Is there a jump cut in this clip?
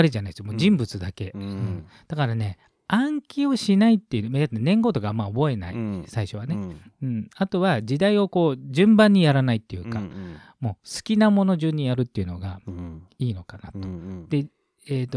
no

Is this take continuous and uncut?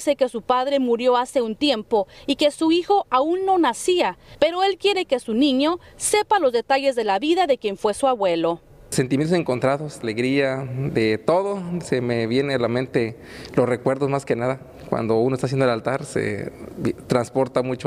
no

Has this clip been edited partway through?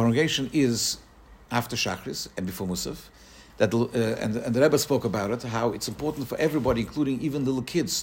yes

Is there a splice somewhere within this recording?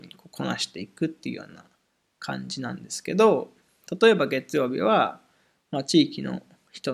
no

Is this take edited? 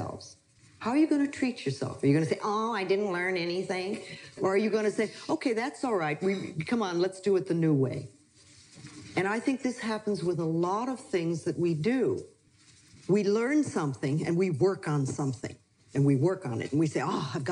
no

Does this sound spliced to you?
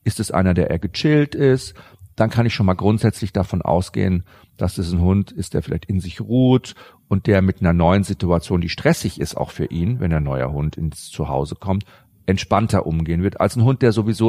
no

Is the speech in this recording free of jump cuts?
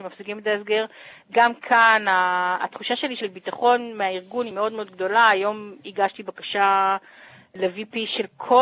yes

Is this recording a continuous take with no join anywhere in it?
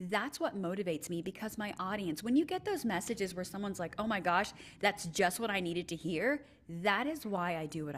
yes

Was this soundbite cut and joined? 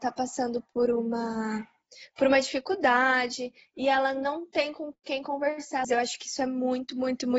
yes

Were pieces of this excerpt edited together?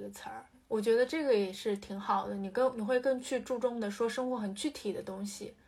no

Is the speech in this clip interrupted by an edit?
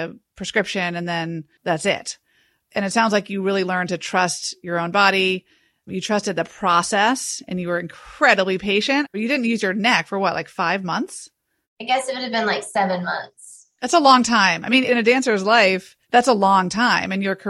no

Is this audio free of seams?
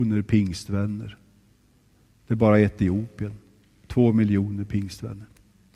yes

